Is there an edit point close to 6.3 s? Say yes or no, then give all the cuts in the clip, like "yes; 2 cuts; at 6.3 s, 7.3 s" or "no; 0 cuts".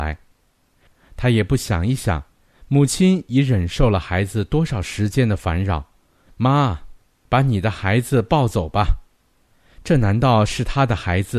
yes; 1 cut; at 6.3 s